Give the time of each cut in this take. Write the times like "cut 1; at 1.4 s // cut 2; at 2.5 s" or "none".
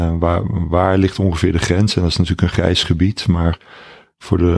none

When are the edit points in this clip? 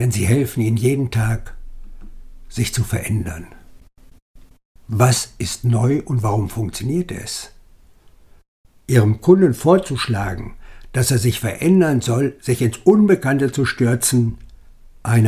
cut 1; at 4.7 s // cut 2; at 12.4 s

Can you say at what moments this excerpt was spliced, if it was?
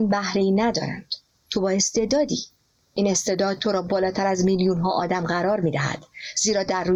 none

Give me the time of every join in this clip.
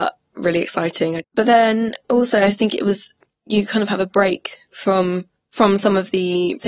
cut 1; at 1.2 s

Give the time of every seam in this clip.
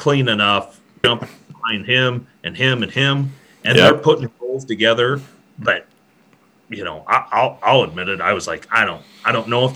cut 1; at 1.0 s

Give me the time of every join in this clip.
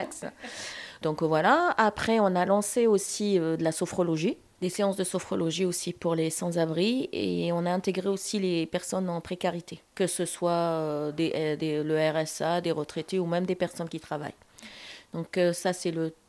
none

